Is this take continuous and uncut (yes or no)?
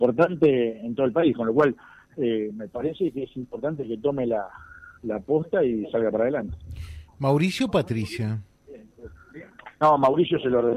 yes